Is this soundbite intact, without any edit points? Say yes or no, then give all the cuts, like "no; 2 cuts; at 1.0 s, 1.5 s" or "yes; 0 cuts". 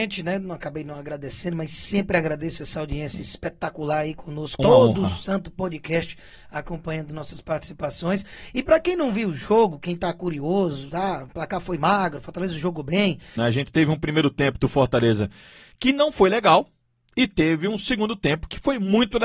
no; 2 cuts; at 4.6 s, 13.4 s